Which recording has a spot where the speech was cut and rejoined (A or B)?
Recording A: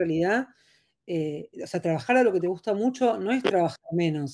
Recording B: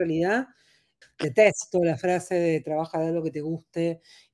B